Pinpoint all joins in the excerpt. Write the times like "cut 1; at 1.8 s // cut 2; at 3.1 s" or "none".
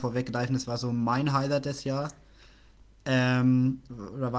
none